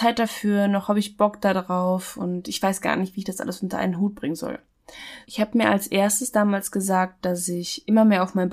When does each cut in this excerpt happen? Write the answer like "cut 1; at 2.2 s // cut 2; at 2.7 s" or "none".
cut 1; at 5.2 s